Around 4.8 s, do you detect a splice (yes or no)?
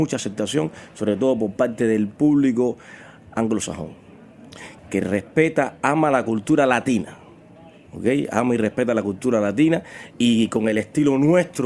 yes